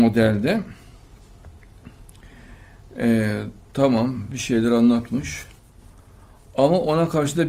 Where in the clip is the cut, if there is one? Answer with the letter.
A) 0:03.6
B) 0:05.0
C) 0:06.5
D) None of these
A